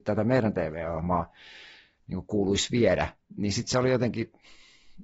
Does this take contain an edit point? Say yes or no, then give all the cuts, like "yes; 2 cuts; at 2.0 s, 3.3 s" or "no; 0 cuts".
no; 0 cuts